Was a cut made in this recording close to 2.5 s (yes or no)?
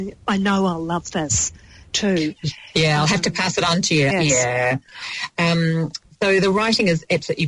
no